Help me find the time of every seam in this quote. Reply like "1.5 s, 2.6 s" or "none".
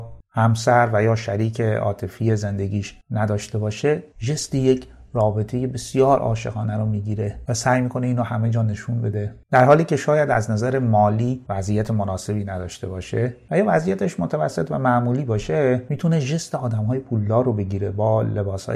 none